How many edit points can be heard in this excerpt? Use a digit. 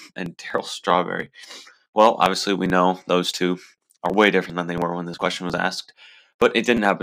0